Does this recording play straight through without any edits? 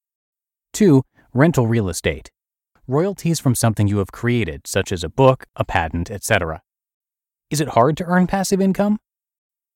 no; 1 cut; at 2.8 s

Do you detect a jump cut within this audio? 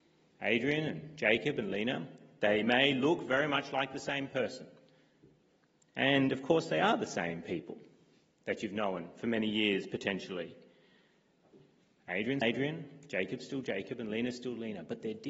yes; 1 cut; at 12.4 s

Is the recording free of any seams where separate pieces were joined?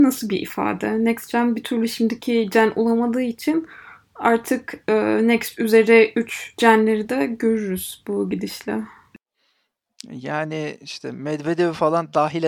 yes; 0 cuts

